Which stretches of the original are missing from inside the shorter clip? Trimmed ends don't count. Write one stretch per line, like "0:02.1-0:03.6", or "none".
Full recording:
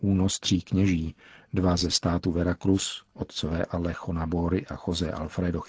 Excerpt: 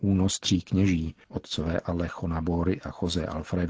0:01.2-0:03.1